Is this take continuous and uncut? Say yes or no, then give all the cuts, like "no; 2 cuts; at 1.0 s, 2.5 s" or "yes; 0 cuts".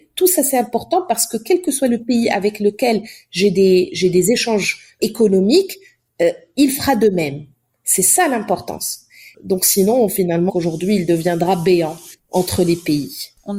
no; 2 cuts; at 5.0 s, 10.5 s